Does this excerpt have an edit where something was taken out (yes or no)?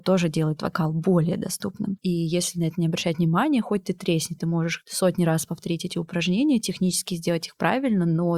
yes